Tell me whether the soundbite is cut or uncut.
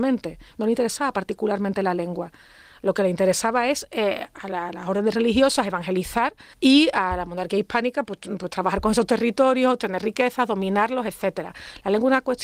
cut